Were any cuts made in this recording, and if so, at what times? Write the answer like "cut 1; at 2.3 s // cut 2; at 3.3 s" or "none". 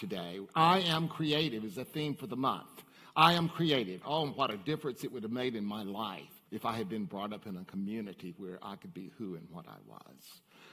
cut 1; at 4.0 s // cut 2; at 6.5 s